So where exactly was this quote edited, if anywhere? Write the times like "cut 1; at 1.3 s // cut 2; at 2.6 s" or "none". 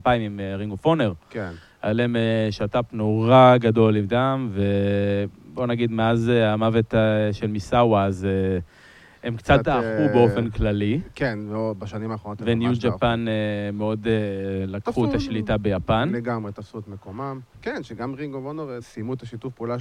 cut 1; at 17.5 s // cut 2; at 18.8 s